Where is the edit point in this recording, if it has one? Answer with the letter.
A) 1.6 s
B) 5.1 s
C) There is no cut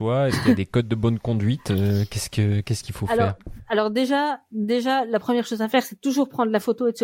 C